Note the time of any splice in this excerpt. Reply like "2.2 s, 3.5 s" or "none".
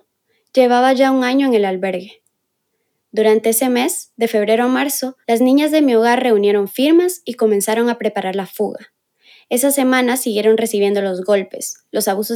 5.2 s